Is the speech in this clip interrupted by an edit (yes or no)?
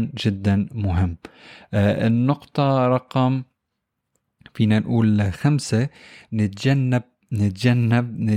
no